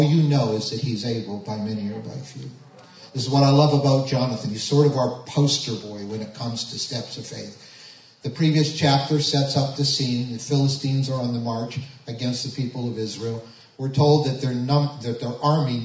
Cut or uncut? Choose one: uncut